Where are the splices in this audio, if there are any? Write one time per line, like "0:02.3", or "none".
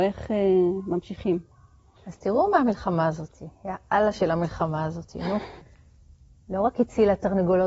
0:02.0
0:05.6